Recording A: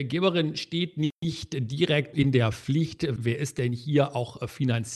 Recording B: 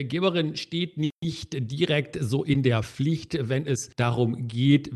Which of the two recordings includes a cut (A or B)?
A